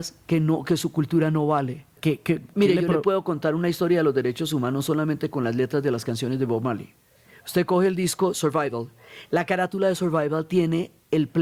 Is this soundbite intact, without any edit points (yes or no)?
no